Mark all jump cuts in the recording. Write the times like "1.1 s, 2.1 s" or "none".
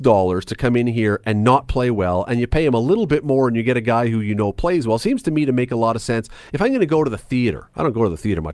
none